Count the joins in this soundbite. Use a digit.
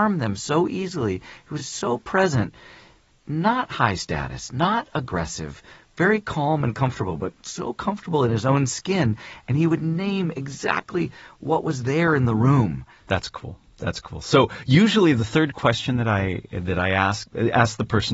0